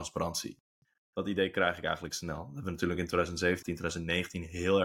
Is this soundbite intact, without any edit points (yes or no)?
no